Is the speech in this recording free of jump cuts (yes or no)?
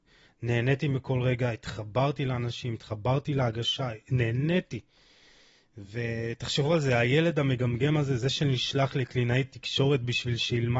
yes